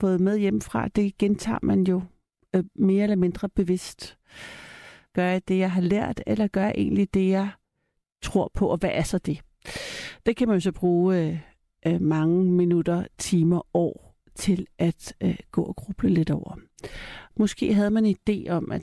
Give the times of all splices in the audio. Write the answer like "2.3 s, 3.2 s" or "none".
5.1 s, 17.3 s